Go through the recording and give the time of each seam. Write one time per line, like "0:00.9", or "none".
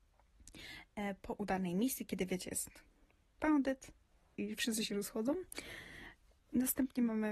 0:04.3
0:06.4